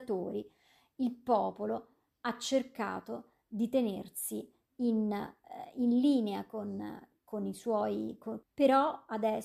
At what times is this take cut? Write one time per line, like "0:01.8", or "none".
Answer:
0:08.4